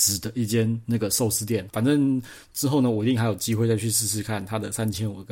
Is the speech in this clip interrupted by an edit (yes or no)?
yes